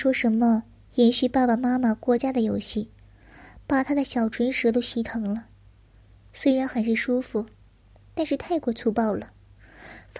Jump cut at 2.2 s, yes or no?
yes